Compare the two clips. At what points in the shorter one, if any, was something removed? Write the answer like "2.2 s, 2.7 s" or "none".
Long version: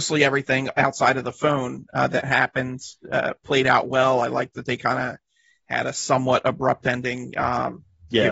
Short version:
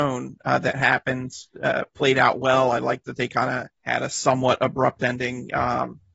3.8 s